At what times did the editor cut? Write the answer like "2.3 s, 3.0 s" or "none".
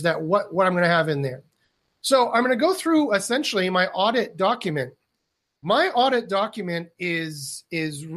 none